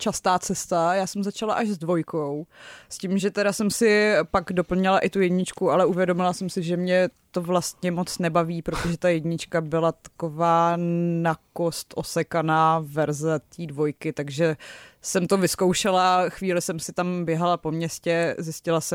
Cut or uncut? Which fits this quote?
uncut